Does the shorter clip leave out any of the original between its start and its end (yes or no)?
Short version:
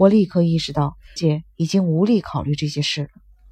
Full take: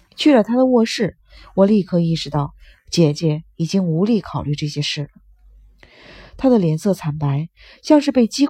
yes